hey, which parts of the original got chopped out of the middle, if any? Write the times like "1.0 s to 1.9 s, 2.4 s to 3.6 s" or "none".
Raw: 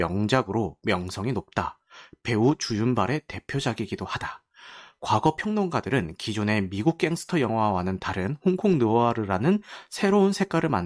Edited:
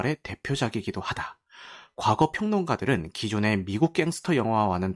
none